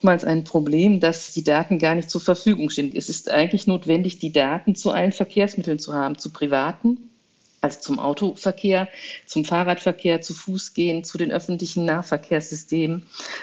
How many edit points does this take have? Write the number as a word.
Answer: one